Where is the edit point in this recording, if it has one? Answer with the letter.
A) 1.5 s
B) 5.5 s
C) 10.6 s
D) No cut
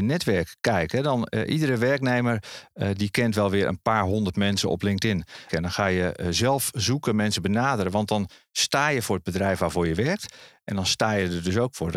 B